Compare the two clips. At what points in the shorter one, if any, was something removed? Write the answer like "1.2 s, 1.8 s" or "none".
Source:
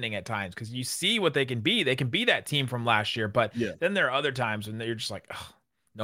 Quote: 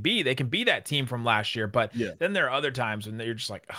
none

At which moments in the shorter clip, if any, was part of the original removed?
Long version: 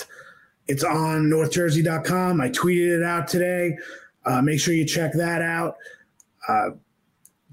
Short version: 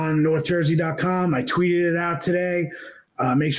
none

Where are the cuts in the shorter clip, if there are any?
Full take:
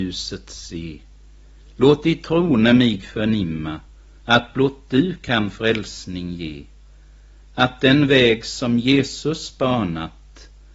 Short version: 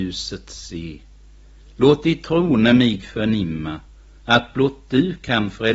none

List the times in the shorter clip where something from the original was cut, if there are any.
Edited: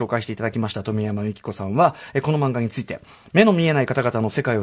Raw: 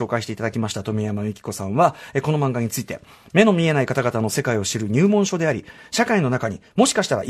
none

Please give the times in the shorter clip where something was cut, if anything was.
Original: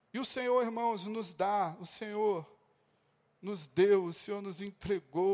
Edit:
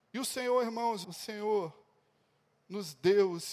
1.0 s

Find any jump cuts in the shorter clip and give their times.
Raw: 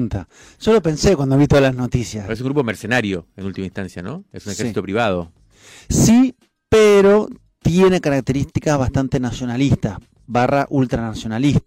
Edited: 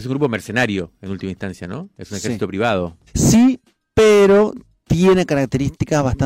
3.1 s

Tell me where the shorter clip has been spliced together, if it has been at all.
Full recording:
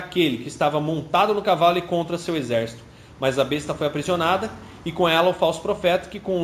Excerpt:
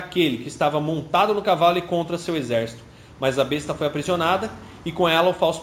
none

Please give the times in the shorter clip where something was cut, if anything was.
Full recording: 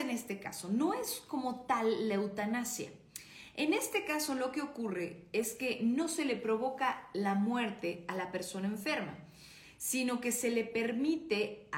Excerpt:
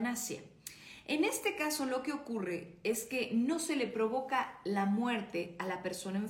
none

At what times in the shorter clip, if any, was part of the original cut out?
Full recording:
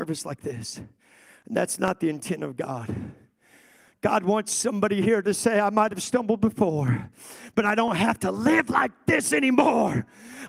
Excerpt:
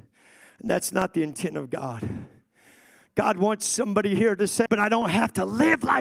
4.7 s

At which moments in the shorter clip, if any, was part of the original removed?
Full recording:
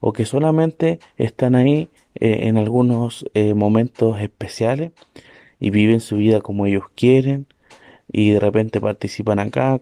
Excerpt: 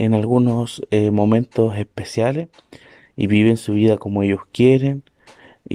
none

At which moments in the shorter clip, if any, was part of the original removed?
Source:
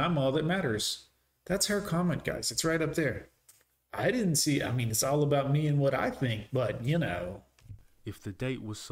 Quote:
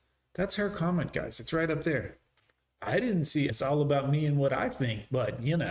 3.5 s

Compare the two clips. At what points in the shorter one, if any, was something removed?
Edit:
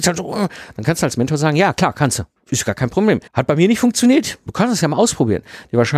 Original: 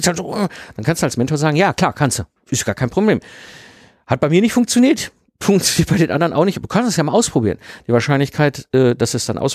3.3 s, 4.5 s

